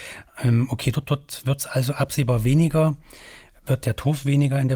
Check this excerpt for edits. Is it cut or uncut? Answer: uncut